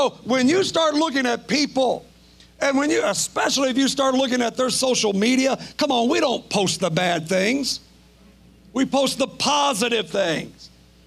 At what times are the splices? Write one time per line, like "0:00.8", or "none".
none